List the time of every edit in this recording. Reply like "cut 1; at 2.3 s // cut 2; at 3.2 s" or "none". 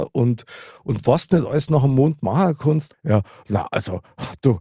cut 1; at 2.9 s